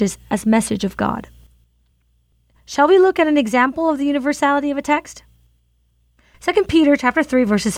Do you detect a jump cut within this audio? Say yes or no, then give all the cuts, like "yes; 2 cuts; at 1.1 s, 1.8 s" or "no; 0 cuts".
no; 0 cuts